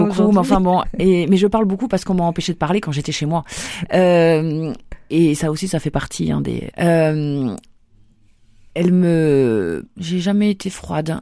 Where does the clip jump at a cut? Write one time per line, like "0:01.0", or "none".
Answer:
0:06.7
0:09.9